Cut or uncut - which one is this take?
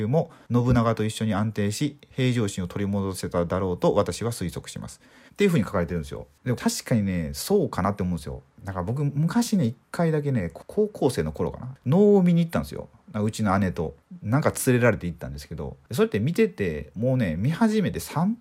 cut